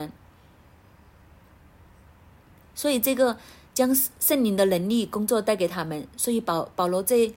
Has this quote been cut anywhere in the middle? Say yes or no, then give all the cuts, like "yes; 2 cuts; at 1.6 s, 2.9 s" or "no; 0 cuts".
no; 0 cuts